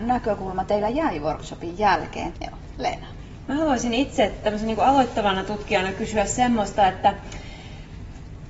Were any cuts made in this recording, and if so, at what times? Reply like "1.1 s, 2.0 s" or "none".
2.3 s, 3.4 s